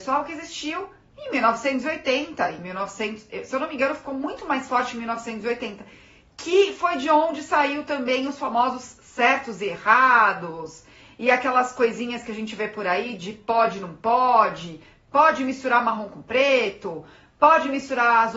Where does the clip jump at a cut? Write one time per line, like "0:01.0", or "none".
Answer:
none